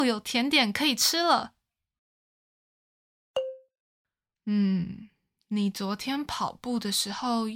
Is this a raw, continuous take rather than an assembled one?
yes; 0 cuts

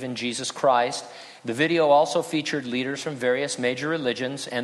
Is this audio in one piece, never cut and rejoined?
no; 1 cut; at 1.4 s

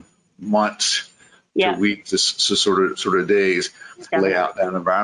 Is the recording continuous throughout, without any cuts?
no; 1 cut; at 4.1 s

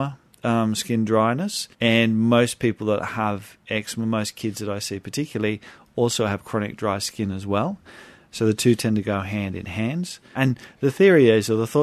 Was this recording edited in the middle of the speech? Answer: yes; 2 cuts; at 1.7 s, 10.4 s

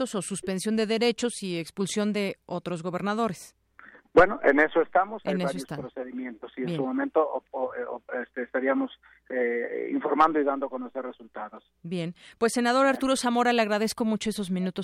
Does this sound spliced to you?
no; 0 cuts

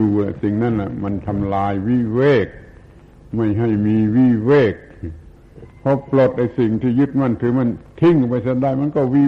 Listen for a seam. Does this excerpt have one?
no; 0 cuts

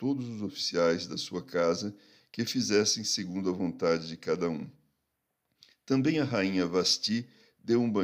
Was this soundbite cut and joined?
no; 0 cuts

